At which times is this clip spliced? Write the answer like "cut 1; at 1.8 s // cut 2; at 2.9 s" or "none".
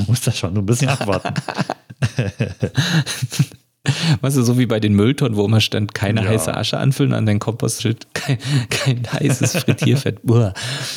cut 1; at 7.8 s